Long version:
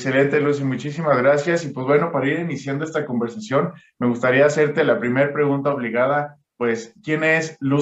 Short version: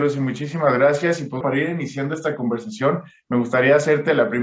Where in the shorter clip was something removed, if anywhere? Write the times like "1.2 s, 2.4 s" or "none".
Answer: 1.4 s